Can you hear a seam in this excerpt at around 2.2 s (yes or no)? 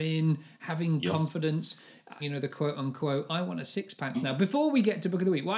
yes